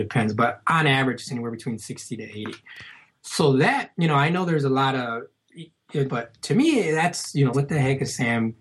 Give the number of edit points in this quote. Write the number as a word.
two